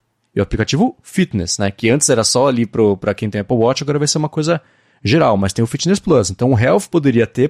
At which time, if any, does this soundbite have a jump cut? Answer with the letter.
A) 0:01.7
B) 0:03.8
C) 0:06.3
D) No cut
D